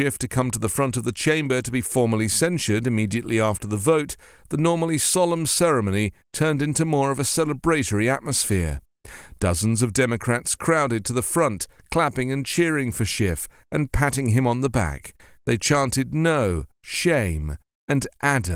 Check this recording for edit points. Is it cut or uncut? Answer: uncut